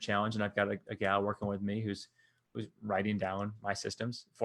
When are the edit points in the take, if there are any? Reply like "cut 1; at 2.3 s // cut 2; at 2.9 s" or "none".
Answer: none